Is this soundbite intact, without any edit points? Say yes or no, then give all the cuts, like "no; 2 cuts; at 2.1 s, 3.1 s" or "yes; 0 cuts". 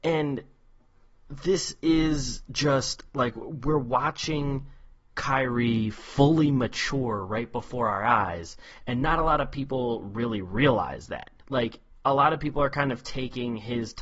no; 1 cut; at 11.4 s